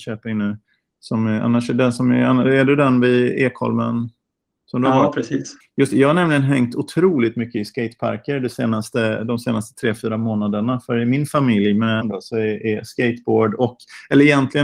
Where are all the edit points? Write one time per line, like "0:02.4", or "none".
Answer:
0:05.6
0:12.0